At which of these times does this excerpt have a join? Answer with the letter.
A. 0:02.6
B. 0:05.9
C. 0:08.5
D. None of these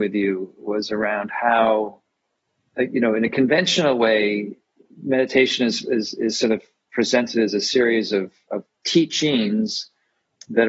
D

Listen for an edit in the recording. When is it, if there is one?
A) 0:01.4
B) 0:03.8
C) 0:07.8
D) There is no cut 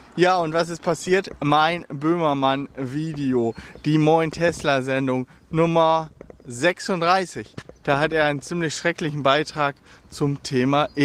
C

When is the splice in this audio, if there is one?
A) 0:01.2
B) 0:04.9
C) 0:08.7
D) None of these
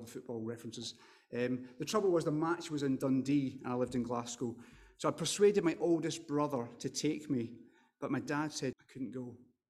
C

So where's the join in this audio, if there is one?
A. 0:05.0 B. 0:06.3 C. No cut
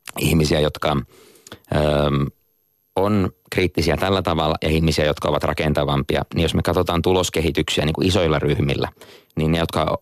C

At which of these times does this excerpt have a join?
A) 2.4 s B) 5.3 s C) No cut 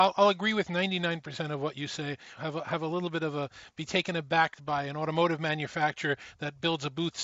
A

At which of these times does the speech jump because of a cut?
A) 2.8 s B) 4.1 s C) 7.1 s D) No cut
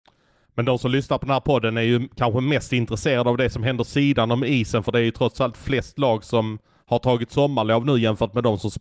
D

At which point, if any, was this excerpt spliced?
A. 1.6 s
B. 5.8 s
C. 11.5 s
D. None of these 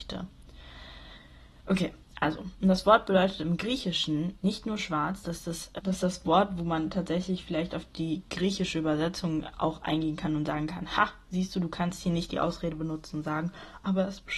B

